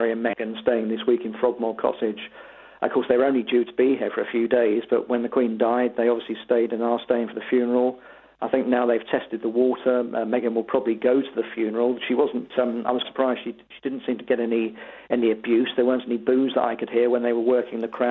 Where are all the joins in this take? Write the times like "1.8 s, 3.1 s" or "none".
13.0 s